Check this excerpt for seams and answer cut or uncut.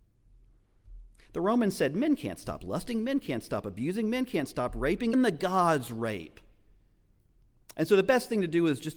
cut